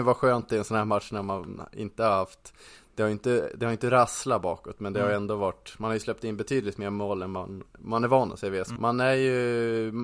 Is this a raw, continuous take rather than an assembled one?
no; 1 cut; at 8.8 s

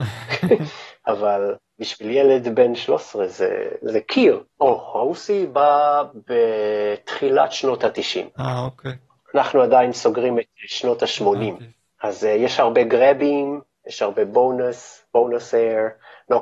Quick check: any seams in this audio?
yes; 1 cut; at 4.5 s

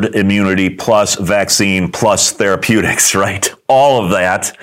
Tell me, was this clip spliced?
no; 0 cuts

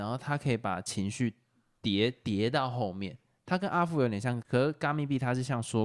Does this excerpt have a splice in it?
yes; 1 cut; at 4.4 s

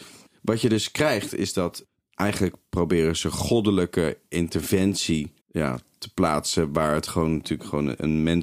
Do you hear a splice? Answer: yes; 1 cut; at 5.4 s

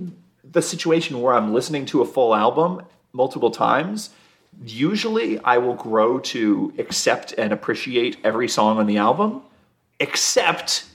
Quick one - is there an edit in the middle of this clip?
no; 0 cuts

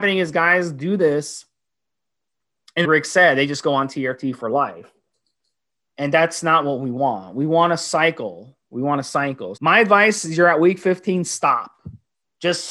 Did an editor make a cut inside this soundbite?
yes; 2 cuts; at 2.8 s, 9.6 s

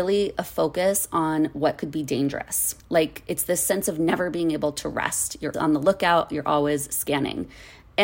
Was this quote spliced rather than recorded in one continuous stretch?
yes; 2 cuts; at 2.8 s, 5.5 s

